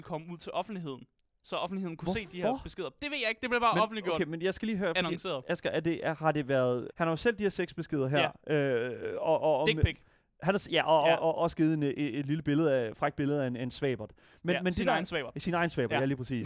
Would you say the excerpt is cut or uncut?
cut